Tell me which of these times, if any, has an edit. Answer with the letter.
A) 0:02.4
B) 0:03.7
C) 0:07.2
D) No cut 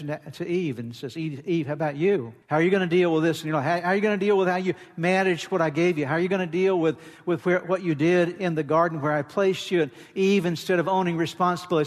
A